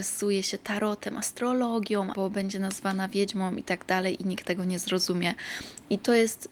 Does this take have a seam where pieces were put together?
yes; 1 cut; at 2.1 s

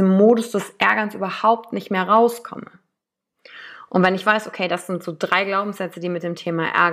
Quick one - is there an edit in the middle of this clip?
no; 0 cuts

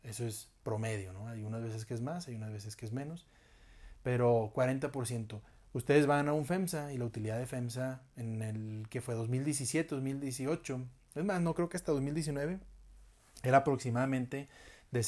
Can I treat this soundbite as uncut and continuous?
yes; 0 cuts

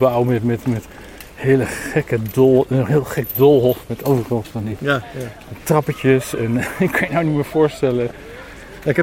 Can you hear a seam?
no; 0 cuts

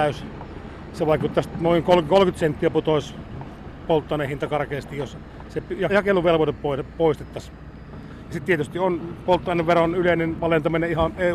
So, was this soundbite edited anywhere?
yes; 1 cut; at 5.9 s

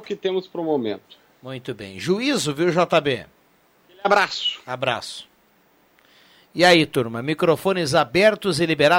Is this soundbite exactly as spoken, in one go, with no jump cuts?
yes; 0 cuts

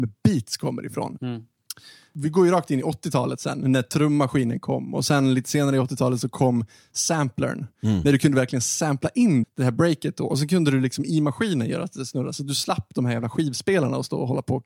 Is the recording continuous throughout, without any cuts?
no; 2 cuts; at 1.2 s, 9.4 s

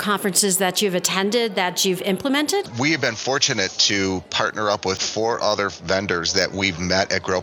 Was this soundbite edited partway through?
no; 0 cuts

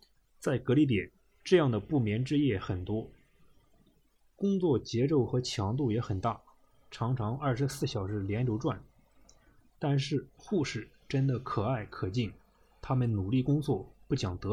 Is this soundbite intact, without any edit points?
no; 1 cut; at 10.4 s

